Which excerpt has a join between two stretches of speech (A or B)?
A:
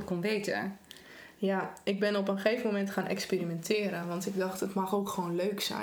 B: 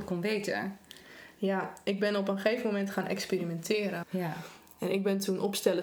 B